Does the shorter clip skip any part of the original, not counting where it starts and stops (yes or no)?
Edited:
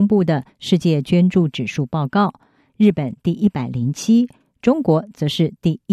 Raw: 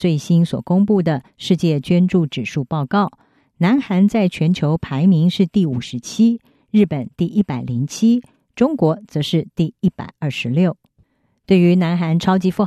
yes